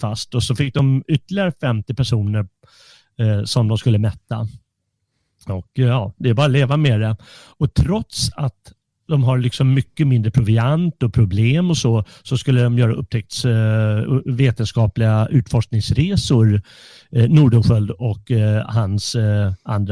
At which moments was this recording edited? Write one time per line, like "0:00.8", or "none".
none